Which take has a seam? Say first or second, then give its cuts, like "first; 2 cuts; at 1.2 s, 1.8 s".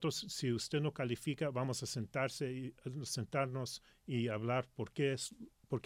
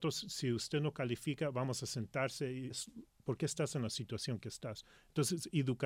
second; 1 cut; at 2.7 s